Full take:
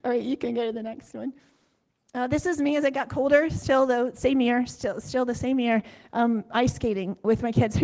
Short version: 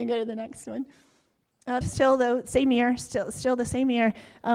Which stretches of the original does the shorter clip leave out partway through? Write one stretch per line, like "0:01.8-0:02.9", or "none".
0:02.3-0:03.5